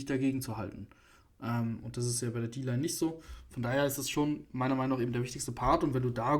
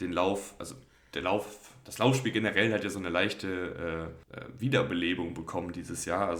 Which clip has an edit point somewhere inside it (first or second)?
second